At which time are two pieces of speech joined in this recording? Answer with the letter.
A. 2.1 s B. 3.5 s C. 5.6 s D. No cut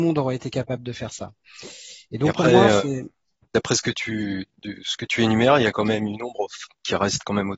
D